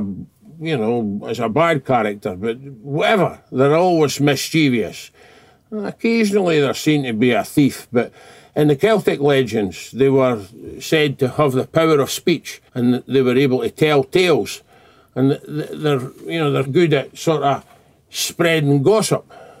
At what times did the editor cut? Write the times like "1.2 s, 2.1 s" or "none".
12.7 s, 16.6 s